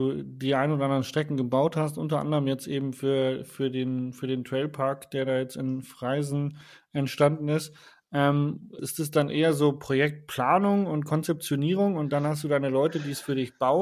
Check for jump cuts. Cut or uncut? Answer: cut